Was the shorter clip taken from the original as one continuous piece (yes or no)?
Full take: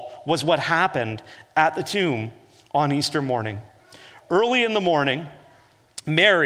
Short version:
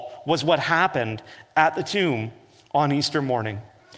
yes